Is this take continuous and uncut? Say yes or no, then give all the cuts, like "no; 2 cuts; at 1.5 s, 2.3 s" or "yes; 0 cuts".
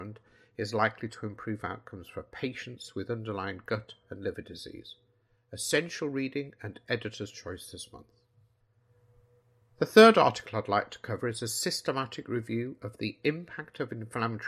yes; 0 cuts